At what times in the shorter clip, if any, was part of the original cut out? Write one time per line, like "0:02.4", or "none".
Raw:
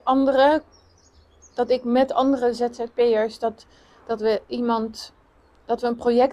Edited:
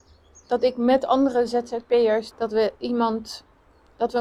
0:02.3